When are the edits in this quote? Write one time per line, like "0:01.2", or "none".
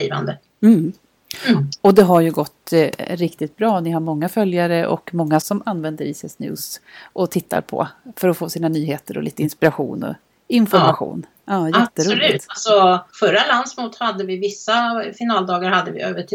0:05.4
0:13.1